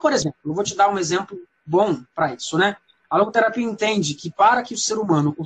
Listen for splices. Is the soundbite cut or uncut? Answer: cut